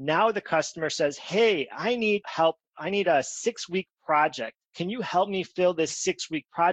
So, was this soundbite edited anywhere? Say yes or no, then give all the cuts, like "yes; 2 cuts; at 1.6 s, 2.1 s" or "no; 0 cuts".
no; 0 cuts